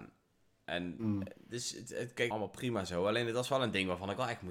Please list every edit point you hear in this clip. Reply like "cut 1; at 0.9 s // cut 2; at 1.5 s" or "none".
cut 1; at 2.3 s

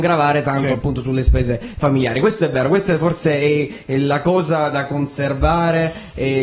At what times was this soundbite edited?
none

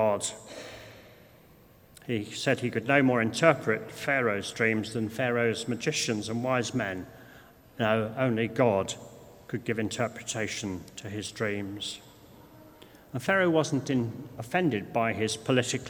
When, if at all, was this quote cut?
none

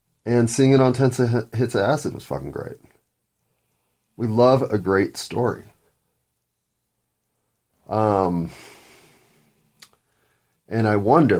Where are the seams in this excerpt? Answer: none

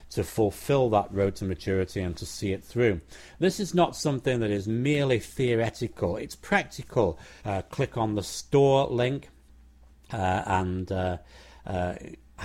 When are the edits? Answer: cut 1; at 7.4 s

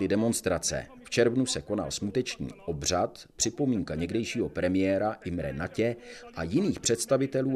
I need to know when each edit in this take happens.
none

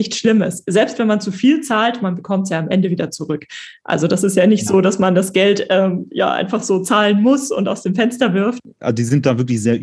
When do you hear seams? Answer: none

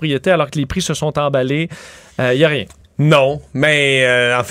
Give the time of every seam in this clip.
none

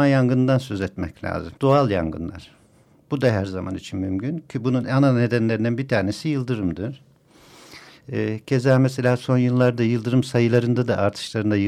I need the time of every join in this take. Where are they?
cut 1; at 1.6 s

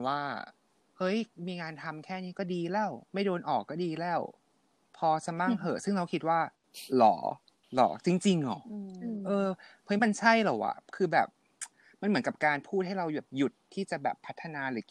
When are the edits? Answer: cut 1; at 3.0 s

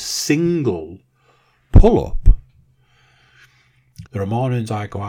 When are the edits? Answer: cut 1; at 4.1 s

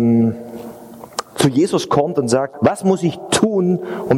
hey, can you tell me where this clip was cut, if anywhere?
cut 1; at 2.5 s

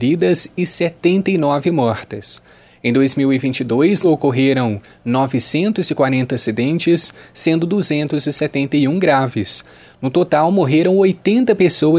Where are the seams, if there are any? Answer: cut 1; at 4.0 s

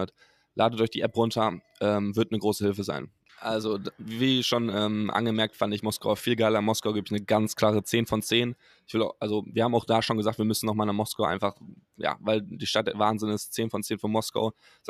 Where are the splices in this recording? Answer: cut 1; at 3.3 s

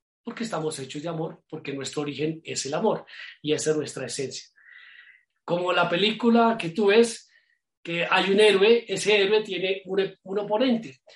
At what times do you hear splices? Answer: cut 1; at 5.3 s

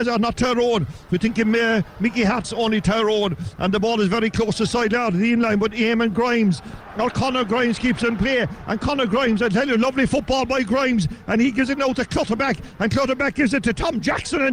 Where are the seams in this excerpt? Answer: cut 1; at 2.4 s

